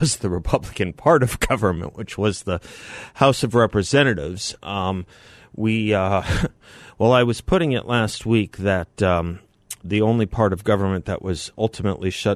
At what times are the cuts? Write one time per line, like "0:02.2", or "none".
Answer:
0:04.6